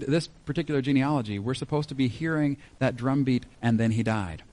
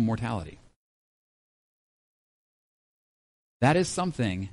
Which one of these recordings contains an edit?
first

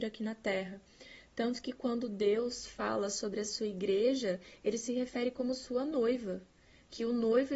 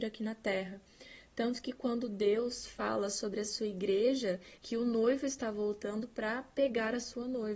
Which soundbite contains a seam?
second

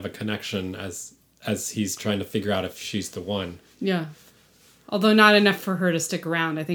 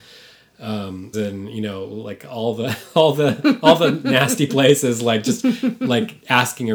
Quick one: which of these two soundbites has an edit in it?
second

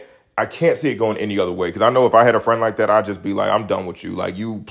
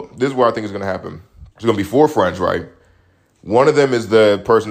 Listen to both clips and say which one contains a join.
second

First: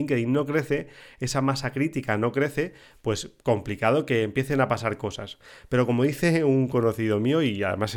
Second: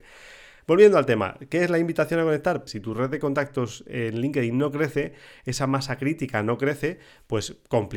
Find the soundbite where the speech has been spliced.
second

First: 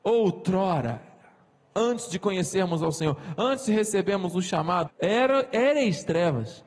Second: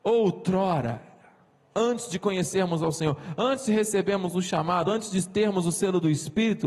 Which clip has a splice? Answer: first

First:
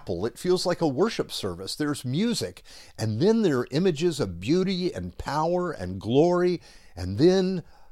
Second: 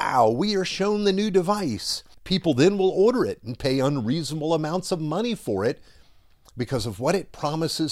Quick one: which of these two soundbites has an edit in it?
second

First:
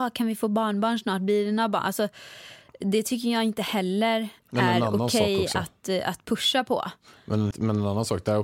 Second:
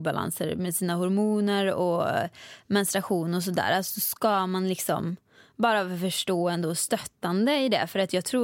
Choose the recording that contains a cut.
first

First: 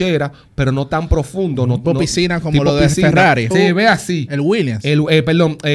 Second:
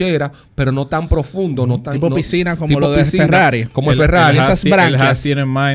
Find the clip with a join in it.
first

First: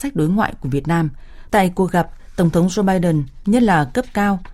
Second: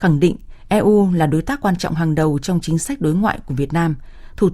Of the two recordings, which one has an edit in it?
first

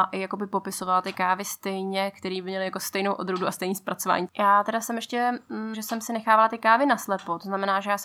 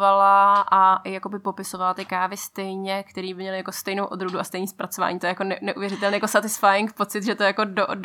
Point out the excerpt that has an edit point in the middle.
first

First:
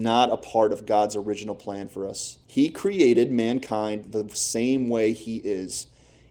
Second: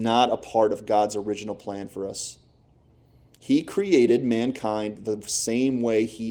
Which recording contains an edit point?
first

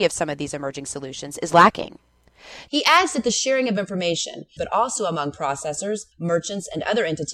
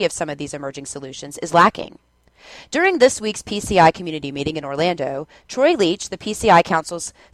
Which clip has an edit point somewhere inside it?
first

